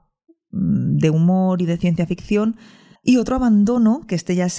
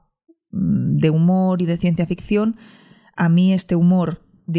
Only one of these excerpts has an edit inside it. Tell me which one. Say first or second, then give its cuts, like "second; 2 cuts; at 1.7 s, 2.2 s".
first; 1 cut; at 3.0 s